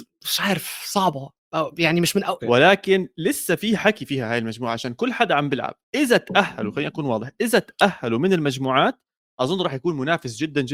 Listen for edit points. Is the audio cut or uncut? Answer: cut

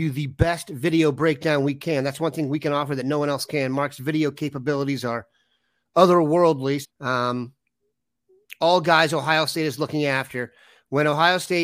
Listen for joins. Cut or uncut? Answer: cut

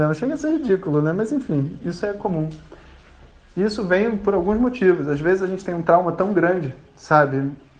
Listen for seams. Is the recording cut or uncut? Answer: uncut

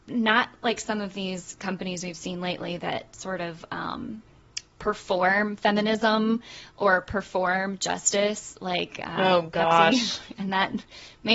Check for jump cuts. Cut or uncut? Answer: uncut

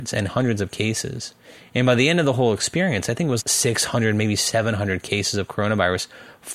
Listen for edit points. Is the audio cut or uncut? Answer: cut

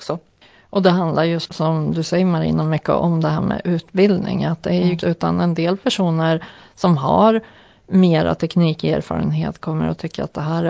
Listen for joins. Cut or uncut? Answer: cut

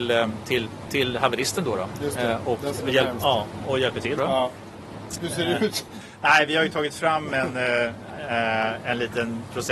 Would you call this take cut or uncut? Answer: cut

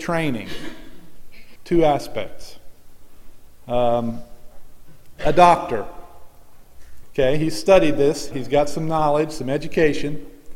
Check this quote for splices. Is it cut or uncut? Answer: cut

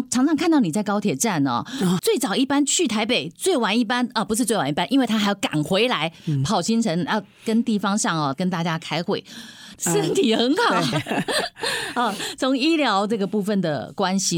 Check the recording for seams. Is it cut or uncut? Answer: cut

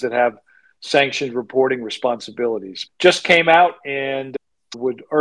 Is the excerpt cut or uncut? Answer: uncut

